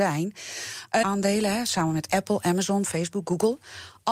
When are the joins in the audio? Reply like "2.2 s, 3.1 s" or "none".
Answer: 1.0 s